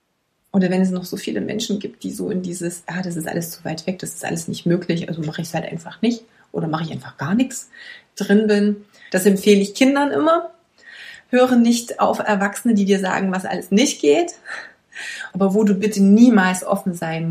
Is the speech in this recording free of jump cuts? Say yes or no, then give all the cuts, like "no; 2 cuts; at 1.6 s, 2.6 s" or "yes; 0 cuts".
no; 2 cuts; at 9.1 s, 15.3 s